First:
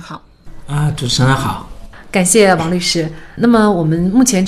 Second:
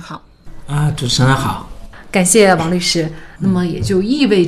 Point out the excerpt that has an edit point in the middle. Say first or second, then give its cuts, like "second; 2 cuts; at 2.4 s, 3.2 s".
second; 1 cut; at 3.4 s